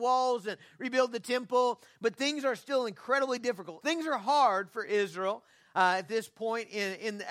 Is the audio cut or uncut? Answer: cut